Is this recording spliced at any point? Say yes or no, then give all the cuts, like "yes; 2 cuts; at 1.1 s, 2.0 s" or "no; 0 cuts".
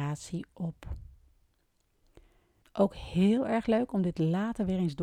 yes; 1 cut; at 2.6 s